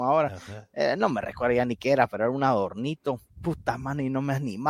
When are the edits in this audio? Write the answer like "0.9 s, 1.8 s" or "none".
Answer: 3.3 s

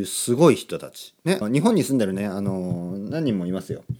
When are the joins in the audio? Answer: 1.4 s

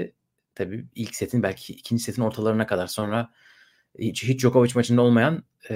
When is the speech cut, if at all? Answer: none

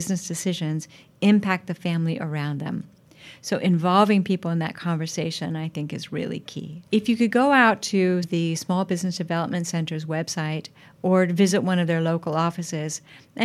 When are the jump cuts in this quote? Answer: 6.9 s, 8.2 s

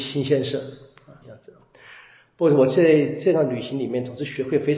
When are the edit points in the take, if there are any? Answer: 1.2 s

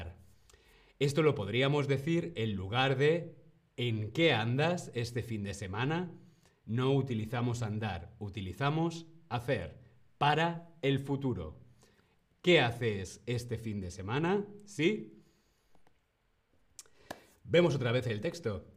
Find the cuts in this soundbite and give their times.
none

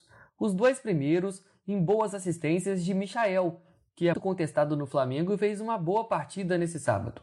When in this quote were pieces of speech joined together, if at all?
4.1 s

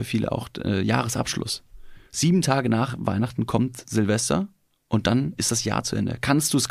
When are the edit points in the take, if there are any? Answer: 2.1 s

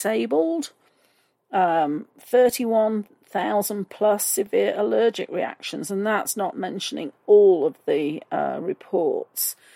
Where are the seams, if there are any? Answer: none

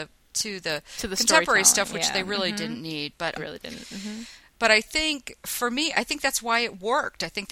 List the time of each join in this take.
3.4 s

